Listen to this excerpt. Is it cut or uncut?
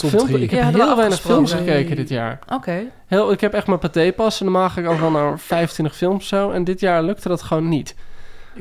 uncut